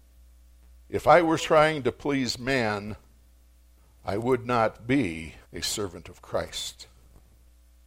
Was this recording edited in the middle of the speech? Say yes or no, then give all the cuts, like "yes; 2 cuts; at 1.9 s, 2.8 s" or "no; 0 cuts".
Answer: yes; 2 cuts; at 1.4 s, 5.4 s